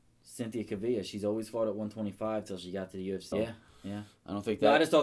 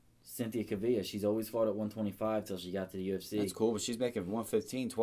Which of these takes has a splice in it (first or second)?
first